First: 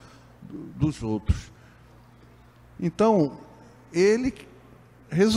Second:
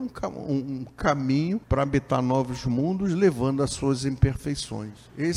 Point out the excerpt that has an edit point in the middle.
second; 1 cut; at 1.6 s

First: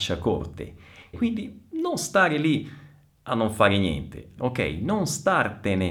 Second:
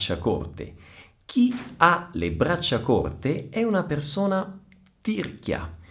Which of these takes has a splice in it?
first; 2 cuts; at 1.1 s, 4.4 s

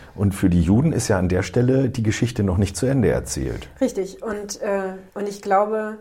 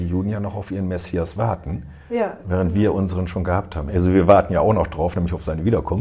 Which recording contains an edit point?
first; 1 cut; at 5.1 s

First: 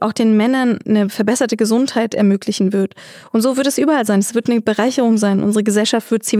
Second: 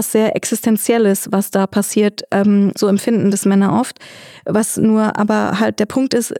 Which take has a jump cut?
second; 1 cut; at 2.8 s

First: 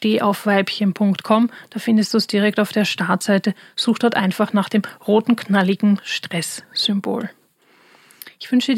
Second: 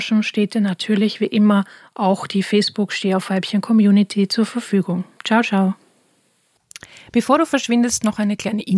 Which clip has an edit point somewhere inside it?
second; 1 cut; at 5.1 s

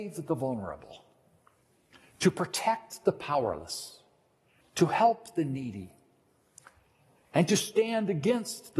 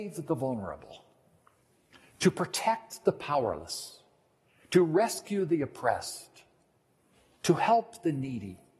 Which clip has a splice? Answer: first; 1 cut; at 4.6 s

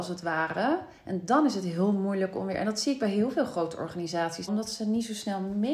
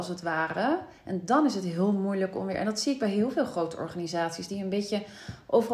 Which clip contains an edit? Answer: first; 1 cut; at 4.5 s

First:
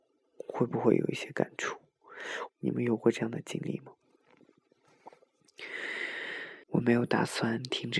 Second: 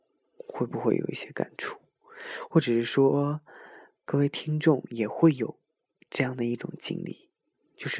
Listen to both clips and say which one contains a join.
first; 2 cuts; at 2.5 s, 6.6 s

